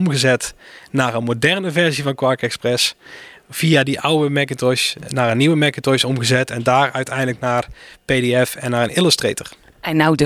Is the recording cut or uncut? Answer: uncut